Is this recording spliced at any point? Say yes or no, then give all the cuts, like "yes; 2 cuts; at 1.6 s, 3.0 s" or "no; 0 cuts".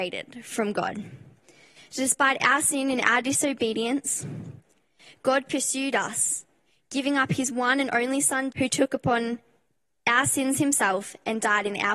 yes; 1 cut; at 8.5 s